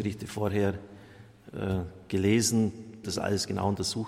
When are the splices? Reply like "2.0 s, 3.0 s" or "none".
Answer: 3.0 s